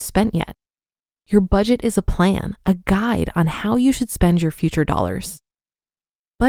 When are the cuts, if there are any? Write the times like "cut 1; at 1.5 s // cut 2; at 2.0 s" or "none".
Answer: none